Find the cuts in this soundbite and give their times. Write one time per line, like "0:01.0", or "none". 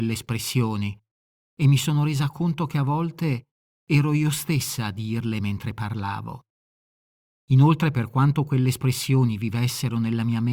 none